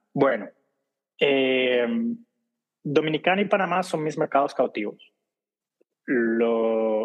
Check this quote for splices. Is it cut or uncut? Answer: uncut